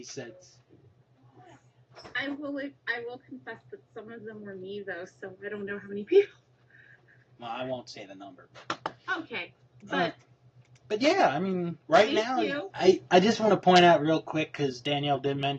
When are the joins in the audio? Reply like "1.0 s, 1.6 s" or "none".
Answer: 12.7 s